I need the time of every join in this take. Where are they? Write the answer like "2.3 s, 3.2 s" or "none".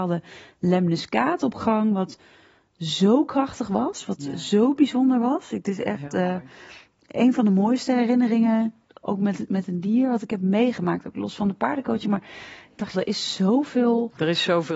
12.9 s